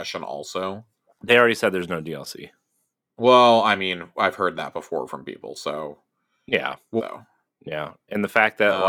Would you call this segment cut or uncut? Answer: cut